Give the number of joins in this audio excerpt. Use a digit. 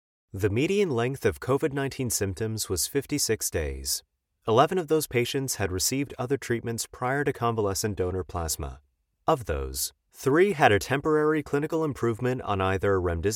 0